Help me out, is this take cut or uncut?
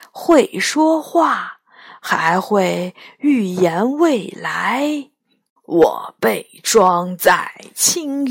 uncut